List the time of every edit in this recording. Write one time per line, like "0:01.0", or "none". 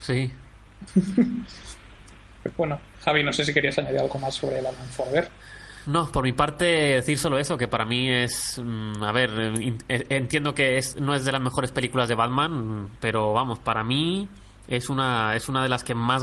none

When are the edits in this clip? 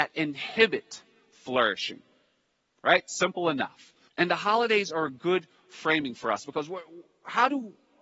0:04.1

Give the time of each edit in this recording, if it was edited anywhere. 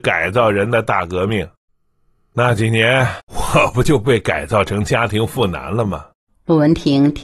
0:06.3

